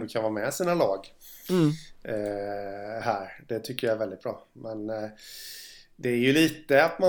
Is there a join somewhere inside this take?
no; 0 cuts

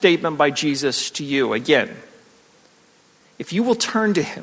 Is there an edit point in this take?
no; 0 cuts

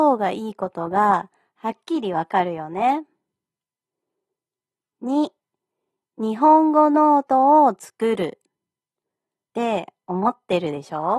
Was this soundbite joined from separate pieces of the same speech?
yes; 1 cut; at 9.5 s

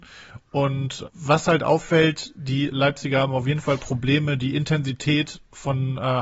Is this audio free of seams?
no; 1 cut; at 1.0 s

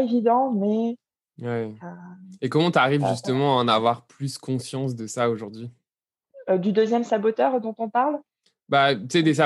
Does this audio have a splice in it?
no; 0 cuts

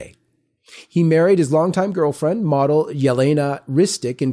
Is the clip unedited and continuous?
yes; 0 cuts

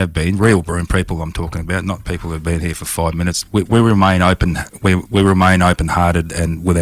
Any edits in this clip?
no; 0 cuts

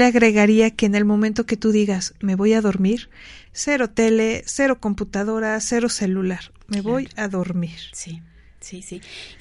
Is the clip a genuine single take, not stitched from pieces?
no; 1 cut; at 3.5 s

